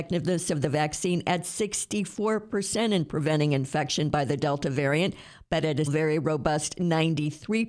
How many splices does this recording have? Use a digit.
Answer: 1